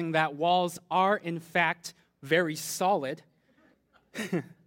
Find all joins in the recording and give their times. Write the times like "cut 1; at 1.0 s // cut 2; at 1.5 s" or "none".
cut 1; at 3.7 s

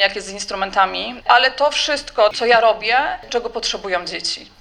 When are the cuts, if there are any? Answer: cut 1; at 1.2 s // cut 2; at 3.3 s

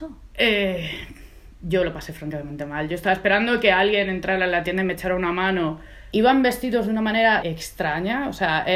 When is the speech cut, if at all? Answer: cut 1; at 6.1 s // cut 2; at 7.4 s

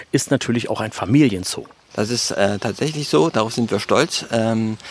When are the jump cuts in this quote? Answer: cut 1; at 1.9 s

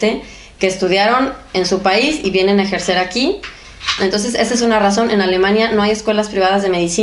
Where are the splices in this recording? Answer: cut 1; at 4.0 s

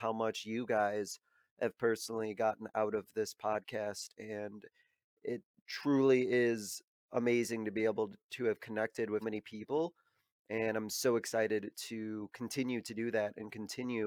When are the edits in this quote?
cut 1; at 9.2 s

